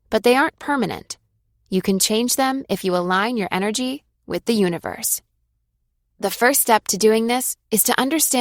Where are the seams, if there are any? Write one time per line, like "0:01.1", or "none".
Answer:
none

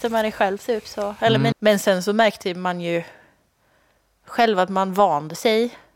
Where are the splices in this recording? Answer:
0:01.5

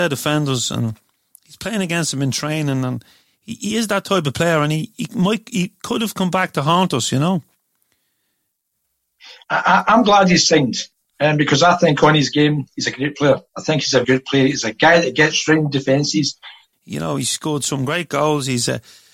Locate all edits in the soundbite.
0:14.0
0:16.7

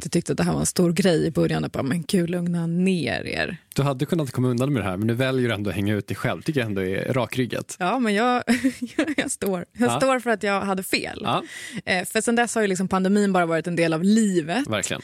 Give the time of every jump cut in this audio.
none

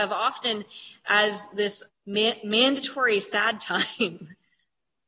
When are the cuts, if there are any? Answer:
0:01.9

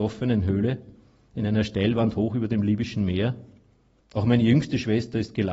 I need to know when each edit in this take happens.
0:04.0

